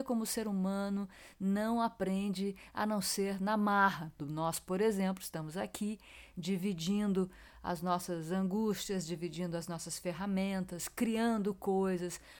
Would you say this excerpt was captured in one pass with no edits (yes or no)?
no